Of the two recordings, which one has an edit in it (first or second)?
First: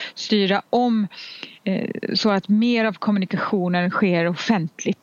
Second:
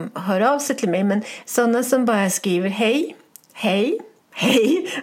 first